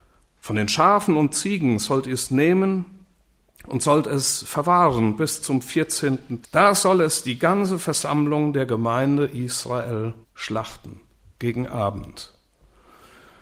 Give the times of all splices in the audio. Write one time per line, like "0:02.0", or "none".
0:06.4
0:10.2